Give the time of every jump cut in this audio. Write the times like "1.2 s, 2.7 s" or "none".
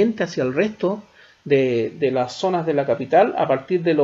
none